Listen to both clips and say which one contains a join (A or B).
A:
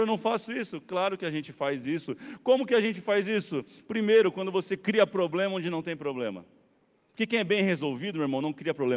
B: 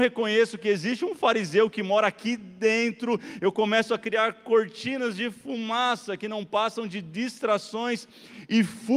A